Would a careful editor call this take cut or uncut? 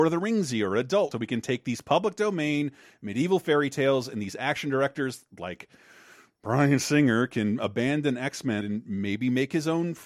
cut